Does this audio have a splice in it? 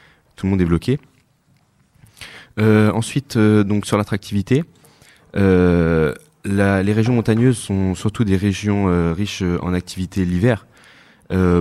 no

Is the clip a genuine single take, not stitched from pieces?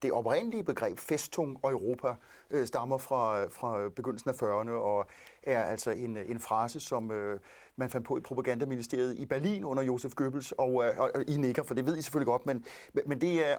yes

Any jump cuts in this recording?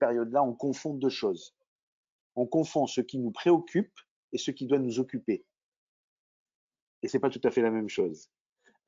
no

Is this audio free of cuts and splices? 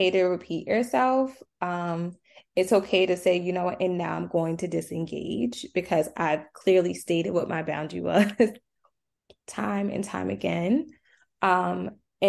yes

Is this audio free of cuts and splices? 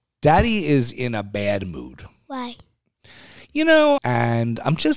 no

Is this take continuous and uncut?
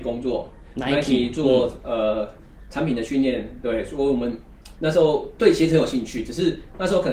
yes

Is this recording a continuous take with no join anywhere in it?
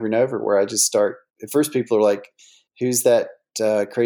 yes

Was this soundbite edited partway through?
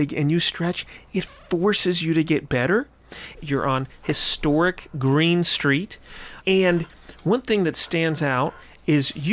yes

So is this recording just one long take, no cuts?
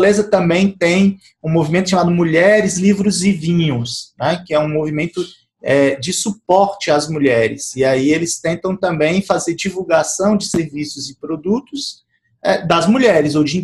yes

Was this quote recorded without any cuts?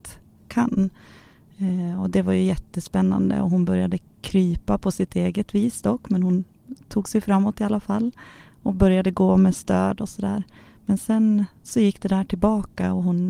yes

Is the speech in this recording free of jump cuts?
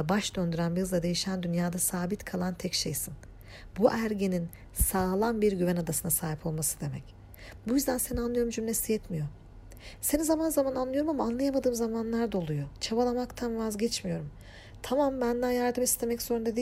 yes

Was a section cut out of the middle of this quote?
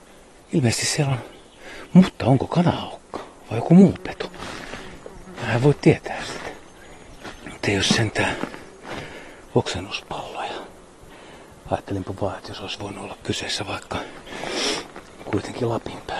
yes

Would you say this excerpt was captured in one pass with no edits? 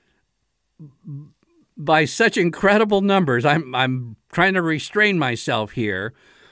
yes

